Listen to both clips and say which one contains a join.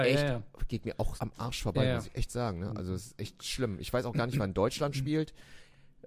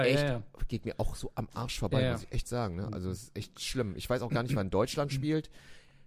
first; 1 cut; at 1.2 s

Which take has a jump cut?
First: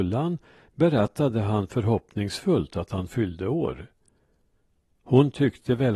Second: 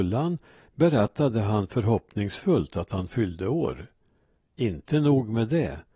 second; 1 cut; at 4.4 s

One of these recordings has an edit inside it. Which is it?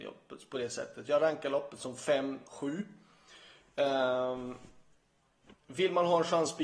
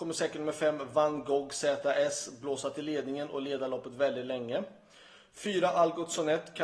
first; 1 cut; at 2.5 s

